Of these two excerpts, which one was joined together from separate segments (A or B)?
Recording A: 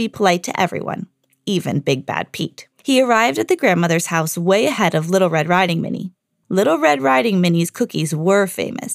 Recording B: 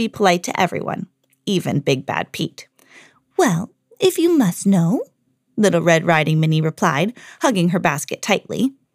A